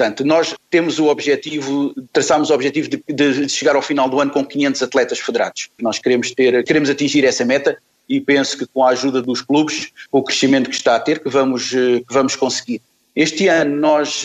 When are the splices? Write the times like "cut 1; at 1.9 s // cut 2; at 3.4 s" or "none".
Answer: cut 1; at 5.8 s

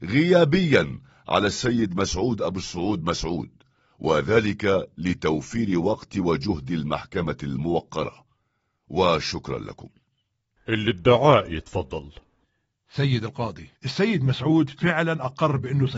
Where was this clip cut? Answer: cut 1; at 13.8 s

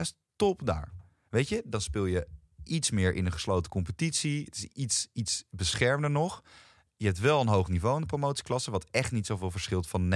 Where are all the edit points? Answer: none

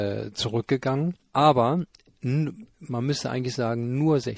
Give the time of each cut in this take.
cut 1; at 1.2 s

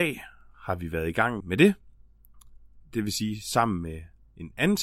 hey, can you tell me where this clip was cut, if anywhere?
cut 1; at 1.4 s

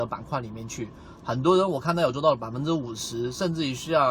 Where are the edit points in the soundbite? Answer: cut 1; at 1.2 s

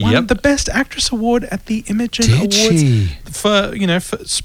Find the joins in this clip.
none

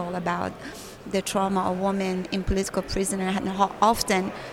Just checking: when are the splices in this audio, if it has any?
none

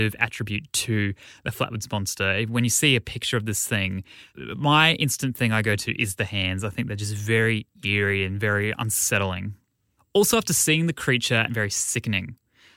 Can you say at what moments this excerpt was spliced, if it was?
cut 1; at 11.5 s

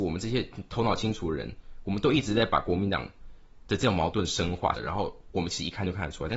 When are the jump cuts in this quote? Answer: cut 1; at 4.7 s

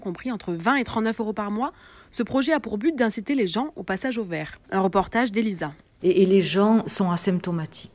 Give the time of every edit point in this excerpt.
cut 1; at 4.6 s // cut 2; at 6.0 s

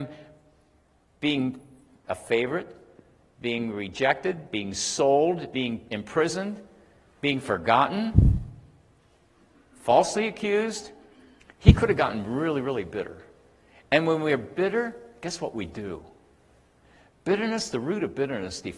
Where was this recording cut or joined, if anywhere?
none

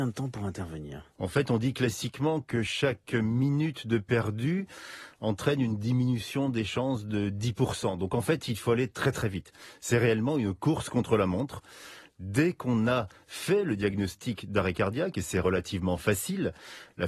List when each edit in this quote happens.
cut 1; at 1.1 s

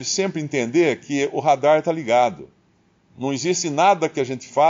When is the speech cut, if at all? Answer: none

